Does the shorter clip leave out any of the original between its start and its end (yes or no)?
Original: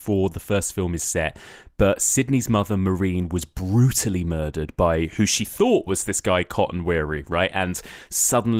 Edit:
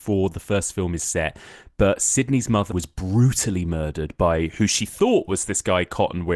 yes